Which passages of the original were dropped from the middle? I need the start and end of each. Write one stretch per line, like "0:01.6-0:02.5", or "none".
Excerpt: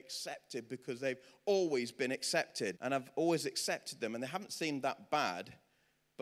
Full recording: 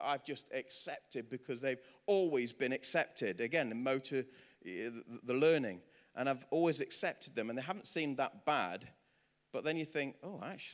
0:03.4-0:06.1